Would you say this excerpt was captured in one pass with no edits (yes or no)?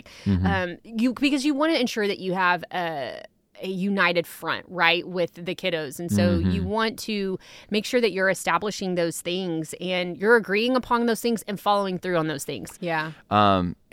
no